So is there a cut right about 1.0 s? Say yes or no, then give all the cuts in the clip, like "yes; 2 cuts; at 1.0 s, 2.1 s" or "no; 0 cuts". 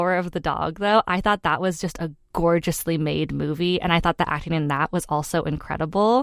no; 0 cuts